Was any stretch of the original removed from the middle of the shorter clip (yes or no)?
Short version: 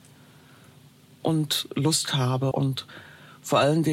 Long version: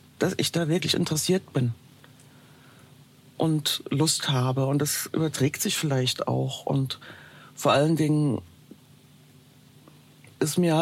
yes